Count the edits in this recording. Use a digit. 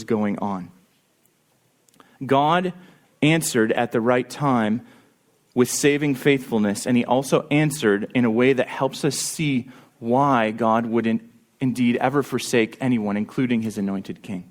0